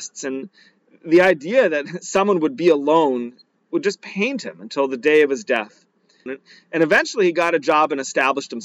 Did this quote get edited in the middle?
yes; 1 cut; at 6.3 s

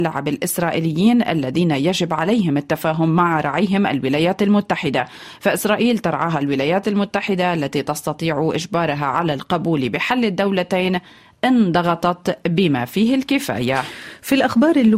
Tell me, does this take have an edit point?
no; 0 cuts

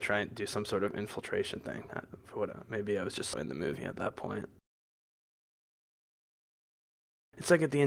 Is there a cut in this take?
yes; 2 cuts; at 1.9 s, 3.3 s

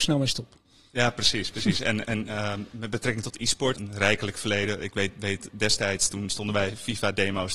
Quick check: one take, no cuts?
no; 1 cut; at 3.8 s

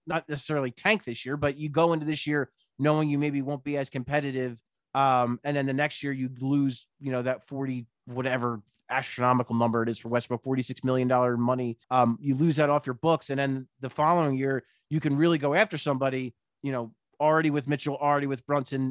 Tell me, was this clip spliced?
yes; 2 cuts; at 11.8 s, 16.5 s

